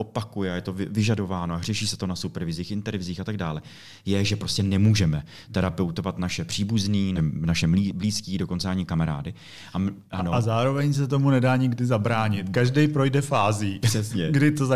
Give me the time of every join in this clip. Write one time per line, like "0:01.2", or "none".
0:07.2